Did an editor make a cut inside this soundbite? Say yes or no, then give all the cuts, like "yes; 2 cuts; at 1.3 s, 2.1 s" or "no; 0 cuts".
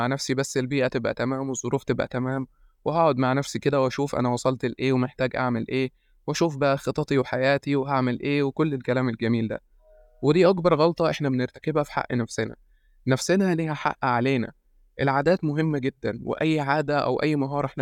no; 0 cuts